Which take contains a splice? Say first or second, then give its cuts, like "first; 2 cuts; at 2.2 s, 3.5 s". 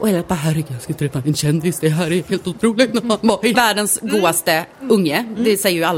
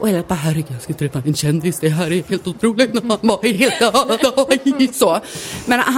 first; 1 cut; at 3.5 s